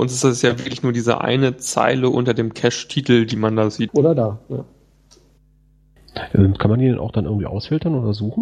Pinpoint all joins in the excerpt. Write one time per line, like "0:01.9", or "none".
0:03.9